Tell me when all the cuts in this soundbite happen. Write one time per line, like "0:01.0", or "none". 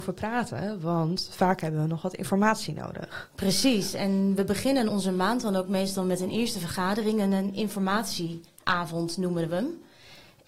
0:04.9